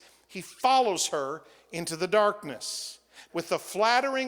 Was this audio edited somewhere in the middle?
yes; 1 cut; at 3.3 s

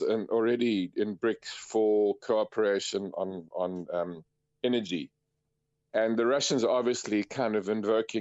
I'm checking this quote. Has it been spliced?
no; 0 cuts

